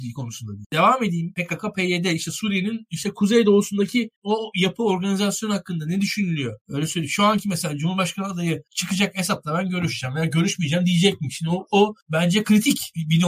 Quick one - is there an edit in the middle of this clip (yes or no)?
yes